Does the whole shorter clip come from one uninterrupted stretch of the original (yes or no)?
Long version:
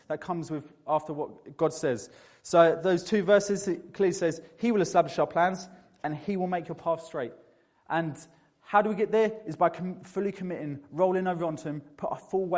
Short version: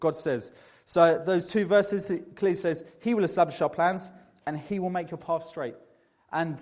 yes